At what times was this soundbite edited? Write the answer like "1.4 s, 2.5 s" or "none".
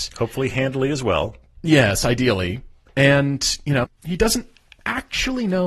3.8 s

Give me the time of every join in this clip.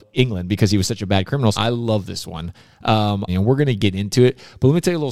1.5 s, 3.3 s

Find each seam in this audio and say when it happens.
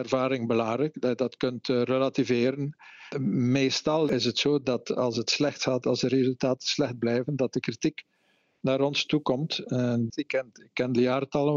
3.1 s, 10.1 s

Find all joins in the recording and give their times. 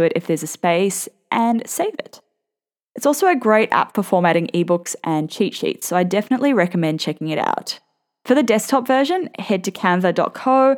none

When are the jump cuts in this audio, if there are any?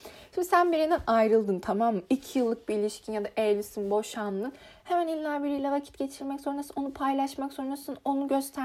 4.8 s

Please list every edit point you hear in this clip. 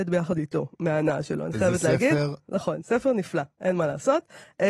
2.5 s

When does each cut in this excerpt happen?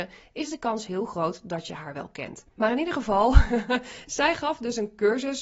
2.5 s

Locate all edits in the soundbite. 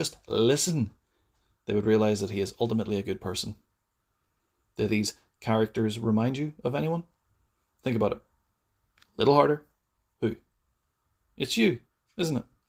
none

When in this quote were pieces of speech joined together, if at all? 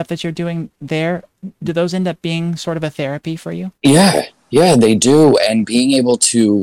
3.7 s

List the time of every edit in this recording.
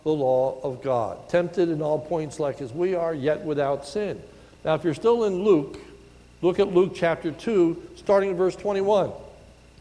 none

